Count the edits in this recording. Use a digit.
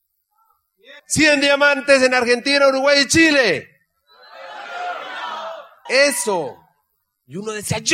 2